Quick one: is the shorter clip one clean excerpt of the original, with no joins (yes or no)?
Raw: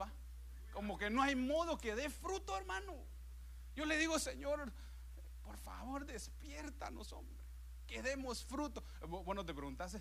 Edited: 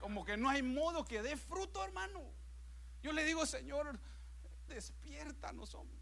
no